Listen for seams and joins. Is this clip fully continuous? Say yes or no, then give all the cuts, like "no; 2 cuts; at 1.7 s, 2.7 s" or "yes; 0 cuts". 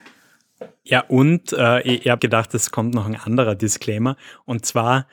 no; 1 cut; at 2.2 s